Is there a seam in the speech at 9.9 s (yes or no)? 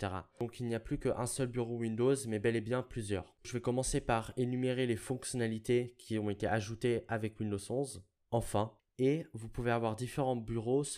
no